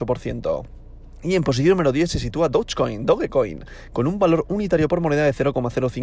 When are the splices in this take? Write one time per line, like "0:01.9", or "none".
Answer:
none